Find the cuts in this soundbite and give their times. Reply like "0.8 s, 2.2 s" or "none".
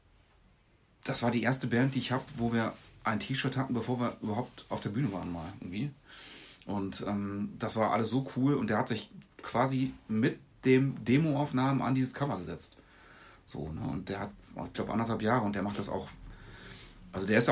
none